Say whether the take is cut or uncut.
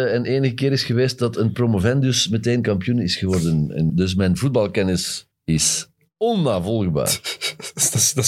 cut